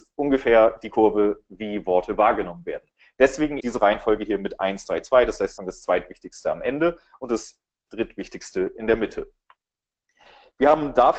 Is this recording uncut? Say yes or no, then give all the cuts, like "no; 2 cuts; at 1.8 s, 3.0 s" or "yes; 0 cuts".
no; 2 cuts; at 3.6 s, 5.6 s